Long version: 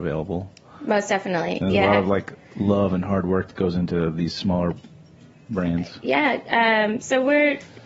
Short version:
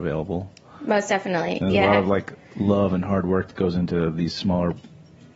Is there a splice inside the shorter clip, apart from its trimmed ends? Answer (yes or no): no